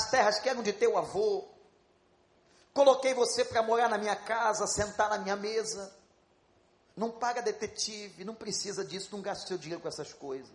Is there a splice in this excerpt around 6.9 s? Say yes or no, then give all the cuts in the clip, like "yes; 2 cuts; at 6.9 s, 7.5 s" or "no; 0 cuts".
yes; 1 cut; at 6.9 s